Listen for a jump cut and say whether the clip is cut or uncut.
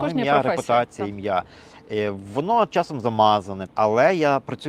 cut